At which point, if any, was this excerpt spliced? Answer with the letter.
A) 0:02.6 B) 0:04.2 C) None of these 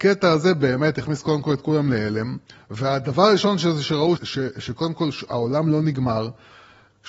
B